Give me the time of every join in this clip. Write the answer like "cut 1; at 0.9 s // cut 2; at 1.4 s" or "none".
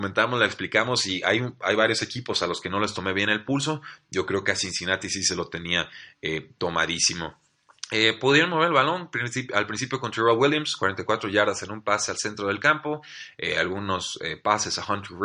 none